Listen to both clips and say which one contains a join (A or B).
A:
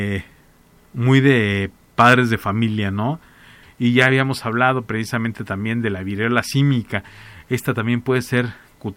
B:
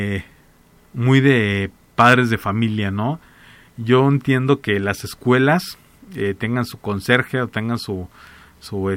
A